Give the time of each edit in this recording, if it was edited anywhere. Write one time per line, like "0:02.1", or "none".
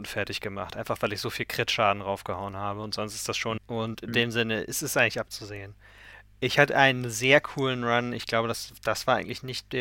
0:03.6